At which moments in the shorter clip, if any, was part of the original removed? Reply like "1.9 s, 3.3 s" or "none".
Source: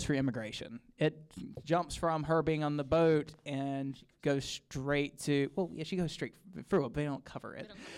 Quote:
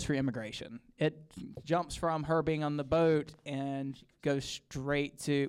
none